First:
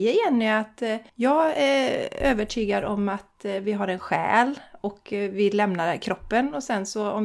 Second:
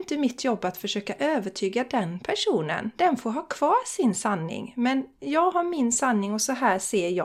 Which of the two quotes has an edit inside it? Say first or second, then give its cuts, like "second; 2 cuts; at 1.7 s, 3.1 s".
first; 1 cut; at 1.1 s